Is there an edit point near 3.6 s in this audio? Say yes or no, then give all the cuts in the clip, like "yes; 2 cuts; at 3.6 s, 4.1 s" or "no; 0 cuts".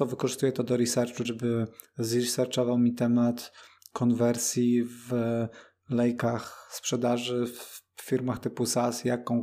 no; 1 cut; at 1.2 s